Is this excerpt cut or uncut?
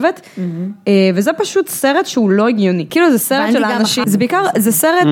cut